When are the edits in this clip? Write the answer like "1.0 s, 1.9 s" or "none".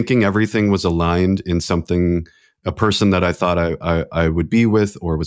none